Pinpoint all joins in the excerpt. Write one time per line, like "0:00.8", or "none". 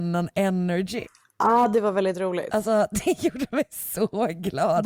none